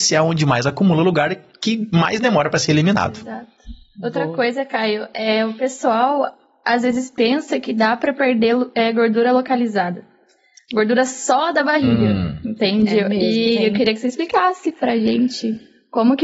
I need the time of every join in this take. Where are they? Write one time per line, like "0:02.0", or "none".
none